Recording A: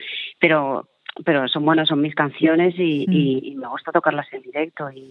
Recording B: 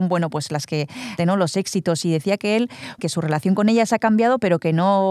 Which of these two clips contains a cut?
B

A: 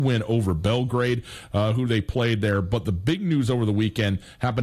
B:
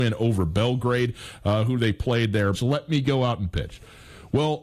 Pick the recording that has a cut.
B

